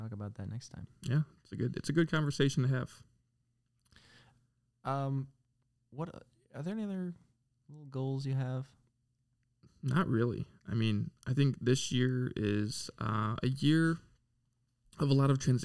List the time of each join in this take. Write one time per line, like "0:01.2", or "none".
none